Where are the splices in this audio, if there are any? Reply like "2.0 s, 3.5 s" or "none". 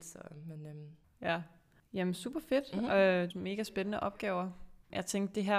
1.0 s, 3.3 s